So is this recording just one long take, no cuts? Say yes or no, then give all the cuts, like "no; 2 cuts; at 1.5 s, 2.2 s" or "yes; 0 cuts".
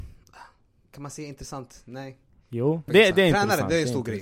no; 1 cut; at 2.9 s